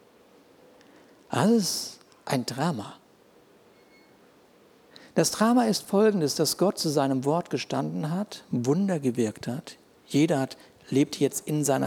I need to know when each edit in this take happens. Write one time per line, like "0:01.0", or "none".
none